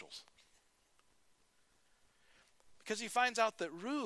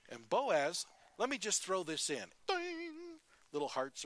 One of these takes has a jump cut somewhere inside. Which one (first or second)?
second